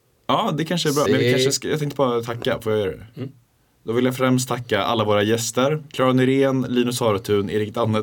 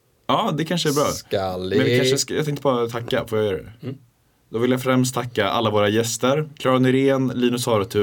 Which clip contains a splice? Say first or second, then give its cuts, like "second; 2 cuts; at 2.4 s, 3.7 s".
first; 1 cut; at 1.0 s